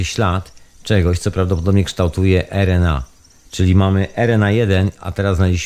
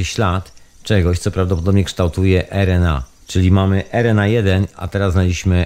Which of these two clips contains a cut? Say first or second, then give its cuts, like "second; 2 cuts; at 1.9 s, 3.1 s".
second; 1 cut; at 3.2 s